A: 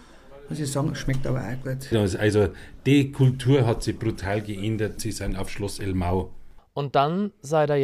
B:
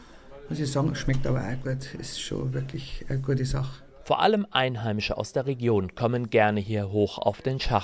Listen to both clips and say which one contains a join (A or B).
A